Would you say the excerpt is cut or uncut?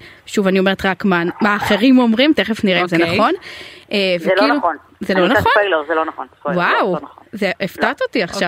uncut